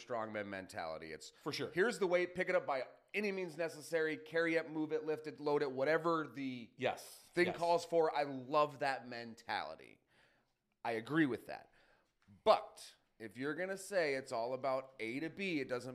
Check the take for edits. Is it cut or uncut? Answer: uncut